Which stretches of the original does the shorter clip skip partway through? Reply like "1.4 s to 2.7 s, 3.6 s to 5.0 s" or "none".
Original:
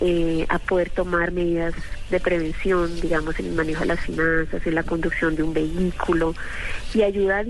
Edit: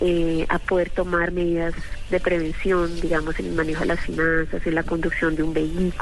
none